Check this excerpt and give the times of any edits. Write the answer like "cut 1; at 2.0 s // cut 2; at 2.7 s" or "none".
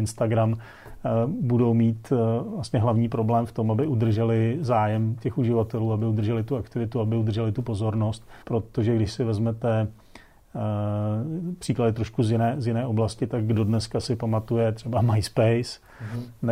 cut 1; at 8.4 s